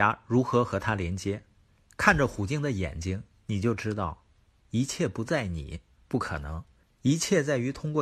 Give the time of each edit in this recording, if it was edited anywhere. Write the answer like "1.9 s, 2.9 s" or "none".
6.8 s